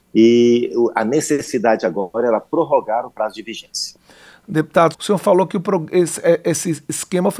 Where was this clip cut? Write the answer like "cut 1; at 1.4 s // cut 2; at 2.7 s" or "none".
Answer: cut 1; at 4.9 s